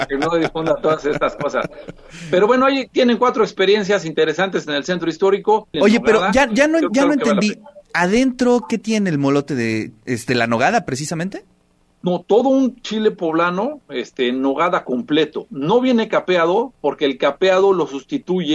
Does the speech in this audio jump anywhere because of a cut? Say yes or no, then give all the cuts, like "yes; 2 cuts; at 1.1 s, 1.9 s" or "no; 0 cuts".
yes; 1 cut; at 5.7 s